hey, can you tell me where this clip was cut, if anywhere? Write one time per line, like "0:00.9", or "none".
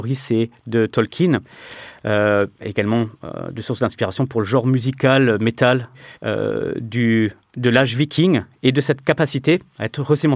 0:06.1